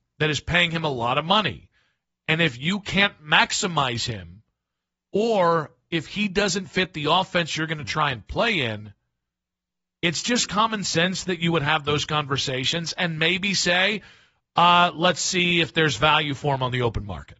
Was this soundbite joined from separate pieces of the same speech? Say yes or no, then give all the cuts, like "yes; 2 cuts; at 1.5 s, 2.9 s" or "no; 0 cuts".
no; 0 cuts